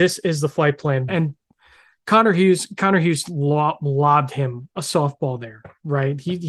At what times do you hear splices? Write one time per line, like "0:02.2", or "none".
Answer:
0:01.1